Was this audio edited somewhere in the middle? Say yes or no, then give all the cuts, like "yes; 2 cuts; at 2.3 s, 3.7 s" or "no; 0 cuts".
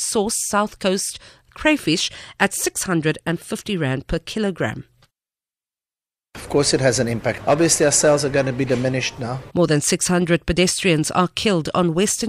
yes; 2 cuts; at 7.4 s, 9.5 s